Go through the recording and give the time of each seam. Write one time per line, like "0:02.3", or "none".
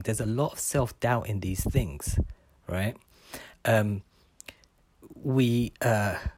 0:03.5